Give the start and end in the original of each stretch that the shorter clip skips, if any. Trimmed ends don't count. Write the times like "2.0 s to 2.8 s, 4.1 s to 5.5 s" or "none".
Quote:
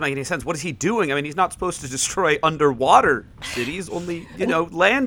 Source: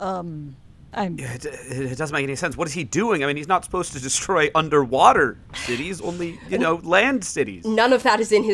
none